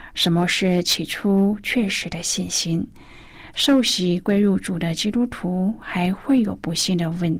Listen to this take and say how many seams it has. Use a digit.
1